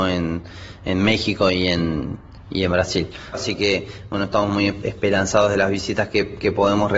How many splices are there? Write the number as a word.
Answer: one